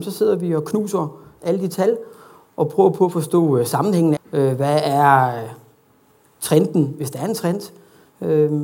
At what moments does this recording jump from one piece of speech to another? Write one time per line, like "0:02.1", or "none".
0:04.2